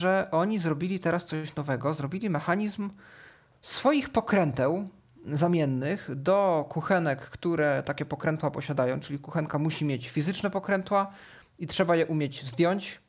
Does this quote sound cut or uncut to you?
uncut